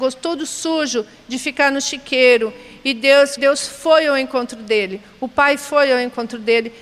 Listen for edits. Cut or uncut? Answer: cut